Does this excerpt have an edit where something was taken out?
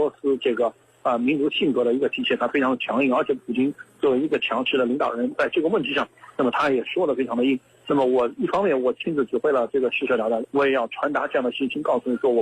yes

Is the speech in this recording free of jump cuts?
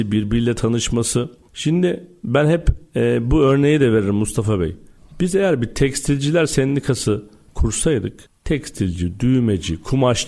yes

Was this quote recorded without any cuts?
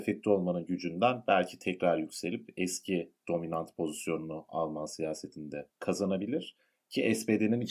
no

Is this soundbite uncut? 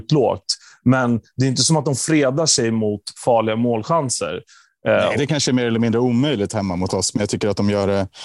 no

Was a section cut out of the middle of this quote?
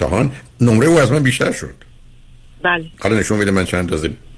yes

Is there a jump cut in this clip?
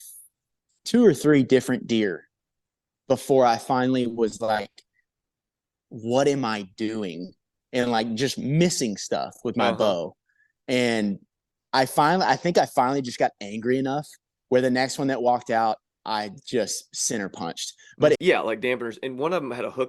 yes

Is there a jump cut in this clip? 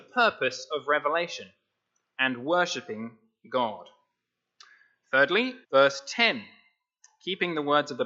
yes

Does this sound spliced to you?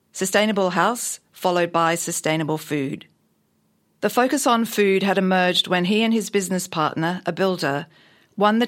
no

